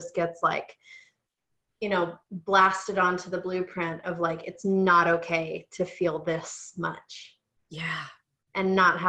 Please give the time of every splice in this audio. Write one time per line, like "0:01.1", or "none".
none